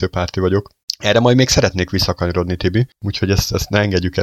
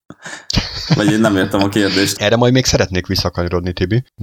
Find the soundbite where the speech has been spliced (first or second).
second